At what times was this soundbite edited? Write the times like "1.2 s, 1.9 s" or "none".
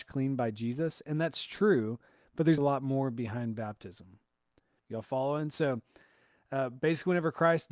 2.6 s, 4.8 s